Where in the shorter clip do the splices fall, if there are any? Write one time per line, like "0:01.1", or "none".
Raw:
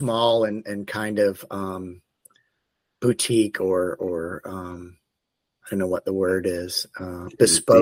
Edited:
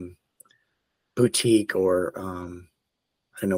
0:02.1